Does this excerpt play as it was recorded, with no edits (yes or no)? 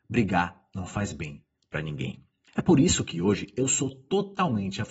no